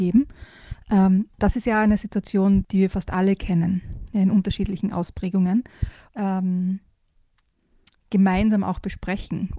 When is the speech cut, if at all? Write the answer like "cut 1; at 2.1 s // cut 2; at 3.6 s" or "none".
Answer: cut 1; at 2.6 s // cut 2; at 6.1 s